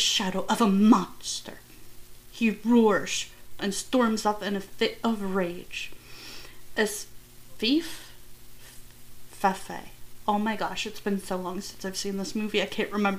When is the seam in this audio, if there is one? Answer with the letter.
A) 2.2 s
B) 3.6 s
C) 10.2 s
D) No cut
B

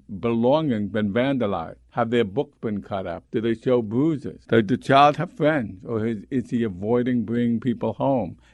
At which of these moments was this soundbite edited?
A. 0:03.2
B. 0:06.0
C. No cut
A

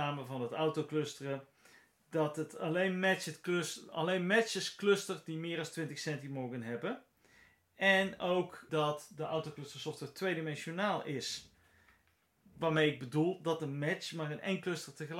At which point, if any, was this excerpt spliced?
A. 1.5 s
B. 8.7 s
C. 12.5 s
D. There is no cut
B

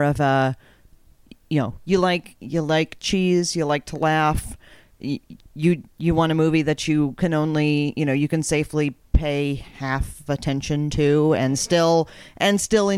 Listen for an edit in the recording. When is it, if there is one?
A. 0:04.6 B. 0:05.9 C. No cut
C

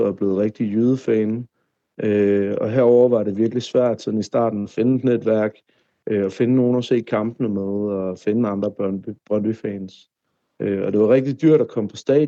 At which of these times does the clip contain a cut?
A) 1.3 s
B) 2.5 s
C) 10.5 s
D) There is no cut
D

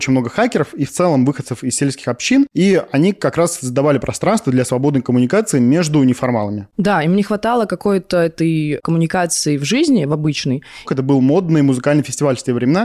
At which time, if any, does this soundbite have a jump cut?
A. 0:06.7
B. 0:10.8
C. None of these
B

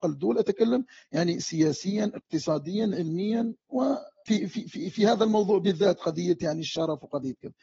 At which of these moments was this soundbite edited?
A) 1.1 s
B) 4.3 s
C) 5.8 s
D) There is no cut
B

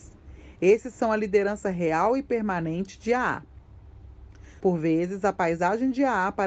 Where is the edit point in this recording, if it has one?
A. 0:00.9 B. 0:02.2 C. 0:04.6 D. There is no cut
C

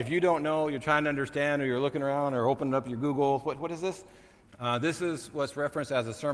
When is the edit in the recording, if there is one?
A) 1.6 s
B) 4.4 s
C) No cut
B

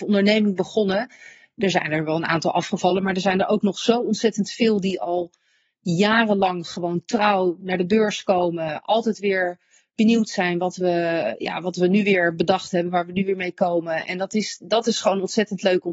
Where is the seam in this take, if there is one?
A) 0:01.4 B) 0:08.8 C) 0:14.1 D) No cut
D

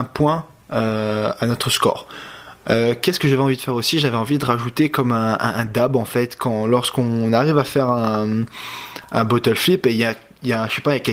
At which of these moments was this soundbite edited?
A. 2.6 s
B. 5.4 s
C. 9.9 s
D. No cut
D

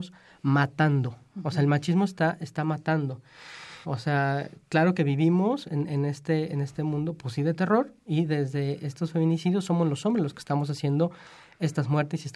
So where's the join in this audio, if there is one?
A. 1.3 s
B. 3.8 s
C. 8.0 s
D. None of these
B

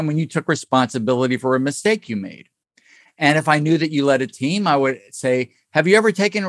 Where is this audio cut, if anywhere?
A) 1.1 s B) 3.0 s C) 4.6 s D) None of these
D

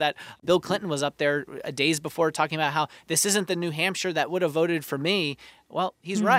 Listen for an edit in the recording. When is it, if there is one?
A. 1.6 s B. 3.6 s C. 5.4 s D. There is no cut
D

